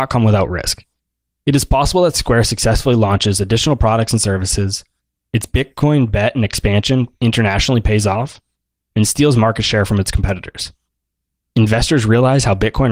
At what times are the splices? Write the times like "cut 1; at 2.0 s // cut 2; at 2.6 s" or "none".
cut 1; at 8.9 s // cut 2; at 11.4 s